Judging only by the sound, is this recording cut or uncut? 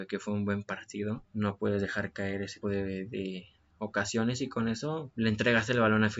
cut